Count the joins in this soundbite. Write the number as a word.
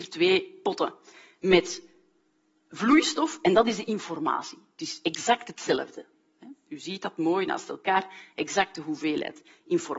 zero